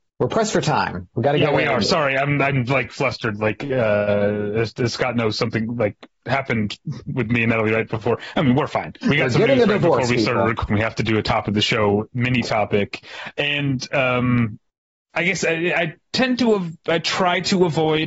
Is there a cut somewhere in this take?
yes; 2 cuts; at 9.0 s, 10.7 s

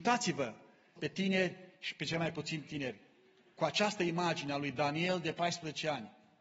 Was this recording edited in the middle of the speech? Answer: yes; 1 cut; at 1.0 s

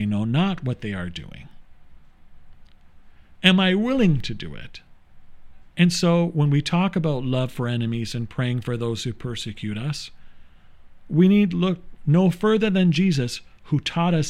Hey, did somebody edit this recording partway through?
yes; 2 cuts; at 3.4 s, 5.7 s

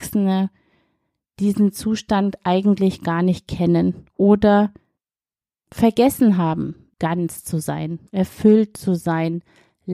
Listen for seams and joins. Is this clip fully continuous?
no; 2 cuts; at 6.9 s, 8.1 s

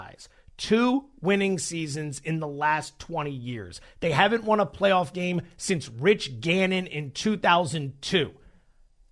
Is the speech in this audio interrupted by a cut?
no; 0 cuts

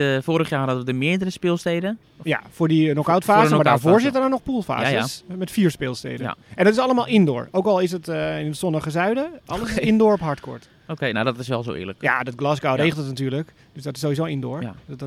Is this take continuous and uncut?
no; 1 cut; at 2.0 s

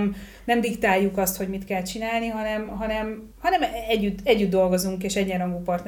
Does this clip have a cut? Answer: no; 0 cuts

